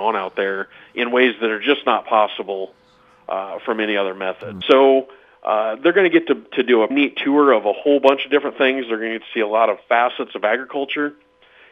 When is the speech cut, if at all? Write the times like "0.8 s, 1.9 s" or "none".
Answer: 4.6 s, 6.9 s